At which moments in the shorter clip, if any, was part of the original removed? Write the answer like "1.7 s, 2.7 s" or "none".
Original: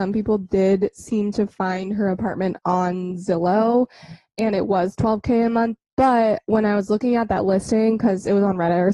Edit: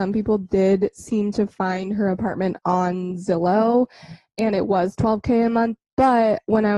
none